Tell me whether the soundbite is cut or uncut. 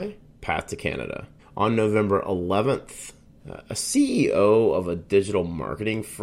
cut